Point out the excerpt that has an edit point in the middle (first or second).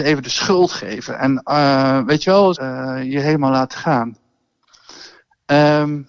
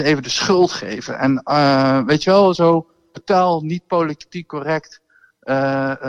first